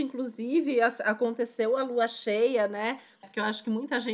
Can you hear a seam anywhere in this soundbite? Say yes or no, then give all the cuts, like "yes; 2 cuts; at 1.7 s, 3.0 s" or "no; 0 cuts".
yes; 1 cut; at 3.2 s